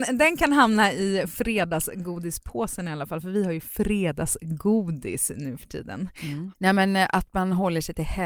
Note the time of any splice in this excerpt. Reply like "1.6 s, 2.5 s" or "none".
6.5 s